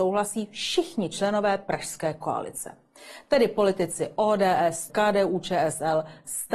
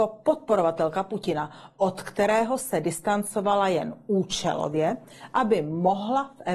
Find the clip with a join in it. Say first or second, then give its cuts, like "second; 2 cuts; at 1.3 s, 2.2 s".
first; 1 cut; at 4.9 s